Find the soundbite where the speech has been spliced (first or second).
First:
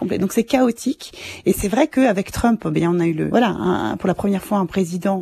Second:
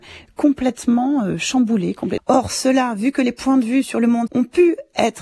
second